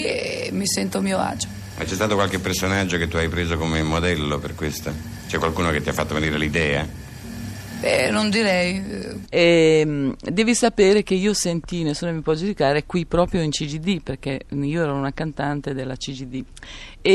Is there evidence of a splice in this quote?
yes; 1 cut; at 9.2 s

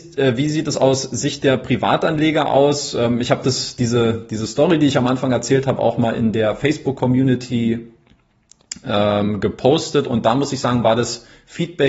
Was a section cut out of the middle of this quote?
no; 0 cuts

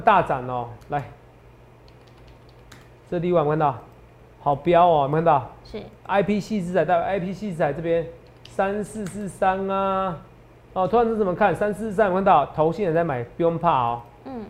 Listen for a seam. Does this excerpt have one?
no; 0 cuts

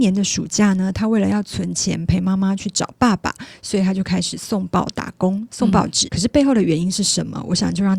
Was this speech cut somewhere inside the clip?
yes; 1 cut; at 6.1 s

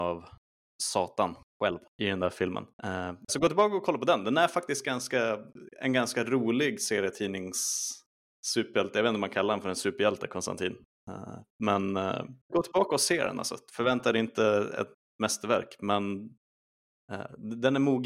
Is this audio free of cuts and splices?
no; 2 cuts; at 3.3 s, 12.5 s

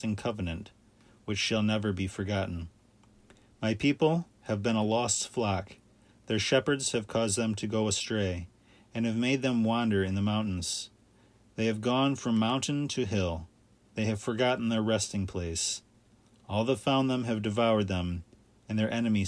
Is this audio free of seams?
yes; 0 cuts

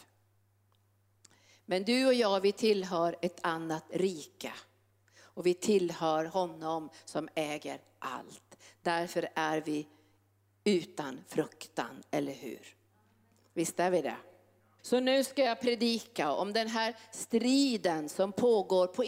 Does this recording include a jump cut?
yes; 1 cut; at 14.8 s

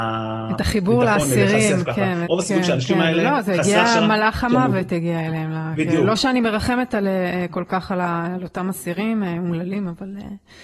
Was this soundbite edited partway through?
yes; 1 cut; at 2.3 s

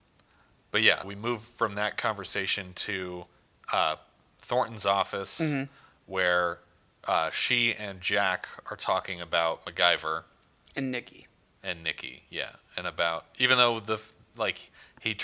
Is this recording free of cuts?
no; 1 cut; at 1.0 s

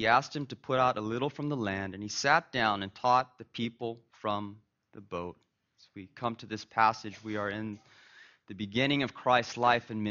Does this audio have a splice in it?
no; 0 cuts

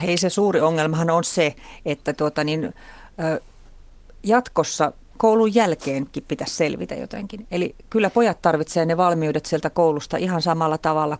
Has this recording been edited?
no; 0 cuts

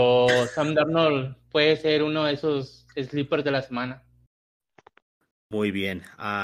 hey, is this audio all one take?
yes; 0 cuts

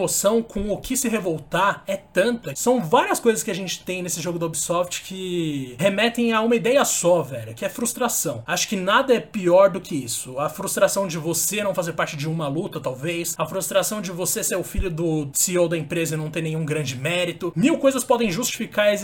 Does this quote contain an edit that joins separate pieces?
no; 0 cuts

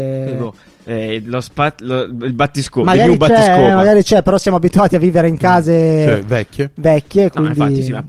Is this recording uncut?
yes; 0 cuts

